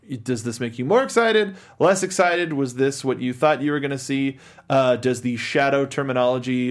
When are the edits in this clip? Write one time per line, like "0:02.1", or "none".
none

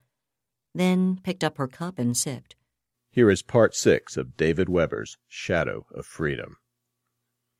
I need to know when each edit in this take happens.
0:02.9

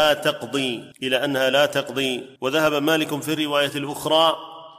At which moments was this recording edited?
0:00.9
0:02.4

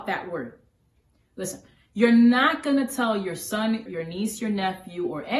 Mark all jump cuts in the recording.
0:03.9

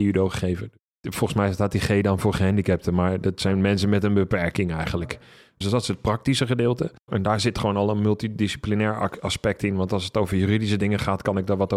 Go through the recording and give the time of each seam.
0:05.6
0:07.1

